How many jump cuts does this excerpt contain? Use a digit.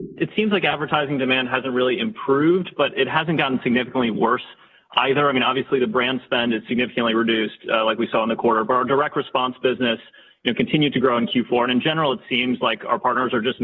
0